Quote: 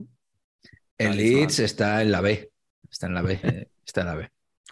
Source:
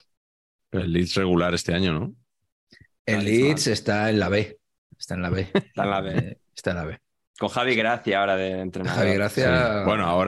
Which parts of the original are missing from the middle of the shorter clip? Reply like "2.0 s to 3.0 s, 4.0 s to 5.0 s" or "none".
5.5 s to 6.1 s